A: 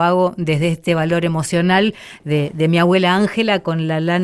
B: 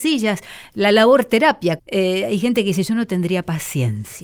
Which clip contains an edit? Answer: B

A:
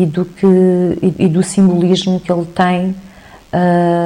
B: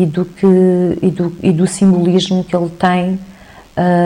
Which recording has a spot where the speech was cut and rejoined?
A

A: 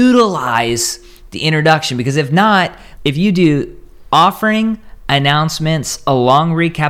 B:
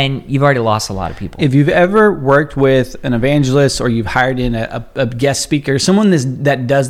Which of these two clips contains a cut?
A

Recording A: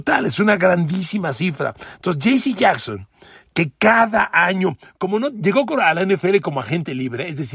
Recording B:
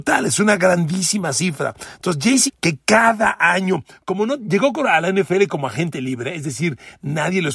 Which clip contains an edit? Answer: B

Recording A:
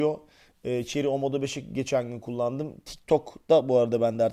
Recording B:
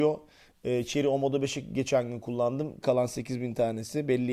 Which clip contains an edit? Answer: B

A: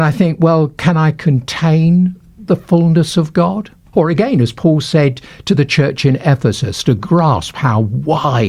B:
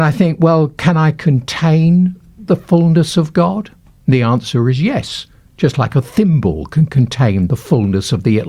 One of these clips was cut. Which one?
A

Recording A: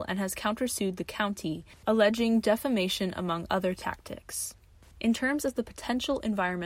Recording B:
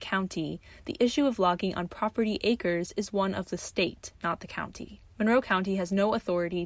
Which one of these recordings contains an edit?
B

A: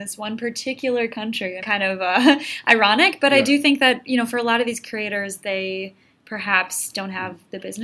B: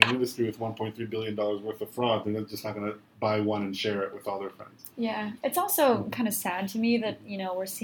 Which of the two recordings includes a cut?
A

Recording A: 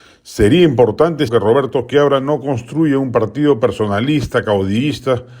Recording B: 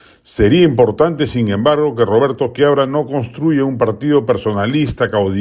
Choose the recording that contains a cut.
A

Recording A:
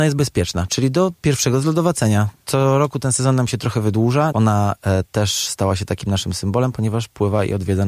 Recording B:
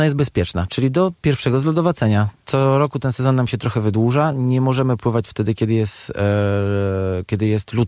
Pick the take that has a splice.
A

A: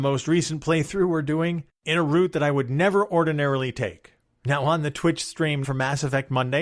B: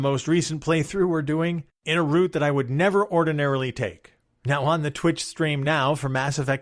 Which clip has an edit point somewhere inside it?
A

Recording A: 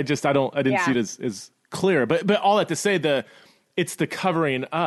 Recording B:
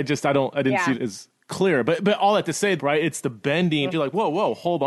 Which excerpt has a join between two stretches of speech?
B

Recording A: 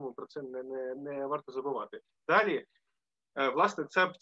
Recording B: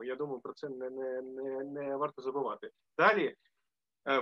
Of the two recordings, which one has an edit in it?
A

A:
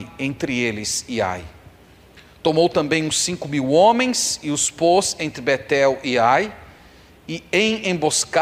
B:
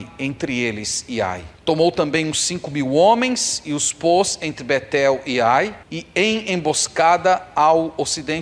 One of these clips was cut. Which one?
B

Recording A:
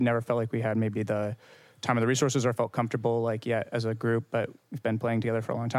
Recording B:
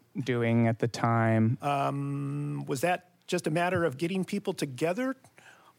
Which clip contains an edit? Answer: B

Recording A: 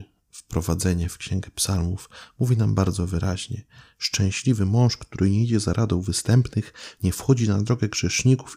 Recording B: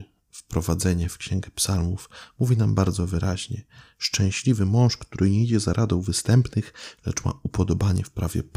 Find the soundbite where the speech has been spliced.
B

